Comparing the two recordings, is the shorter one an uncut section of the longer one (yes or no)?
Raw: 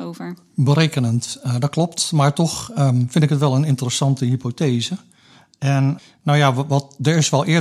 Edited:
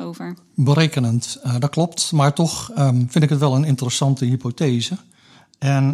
yes